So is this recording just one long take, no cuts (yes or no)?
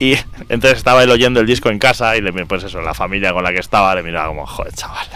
yes